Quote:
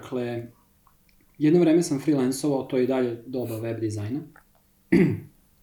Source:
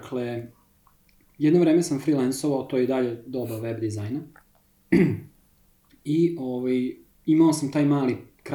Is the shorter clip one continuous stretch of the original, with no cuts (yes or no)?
yes